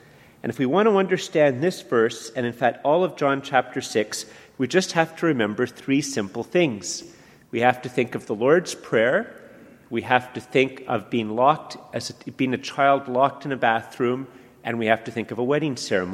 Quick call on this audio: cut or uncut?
uncut